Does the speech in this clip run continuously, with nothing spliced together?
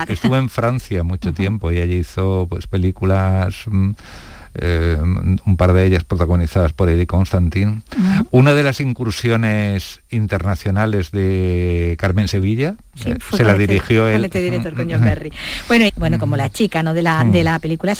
no; 1 cut; at 15.9 s

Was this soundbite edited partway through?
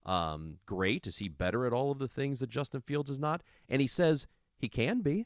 no; 0 cuts

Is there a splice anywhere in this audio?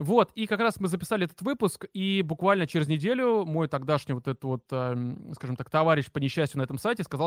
no; 0 cuts

